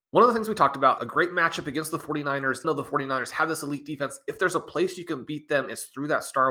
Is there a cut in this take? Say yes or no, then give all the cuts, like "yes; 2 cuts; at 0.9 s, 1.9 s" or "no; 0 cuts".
yes; 2 cuts; at 1.0 s, 2.6 s